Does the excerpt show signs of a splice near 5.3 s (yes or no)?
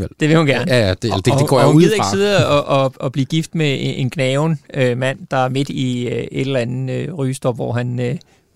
no